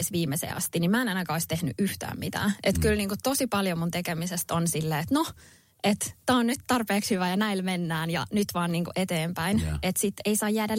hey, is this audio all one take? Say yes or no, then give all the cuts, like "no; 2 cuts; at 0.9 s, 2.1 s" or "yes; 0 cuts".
yes; 0 cuts